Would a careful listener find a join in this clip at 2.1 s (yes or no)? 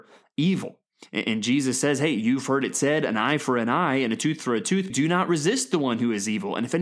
no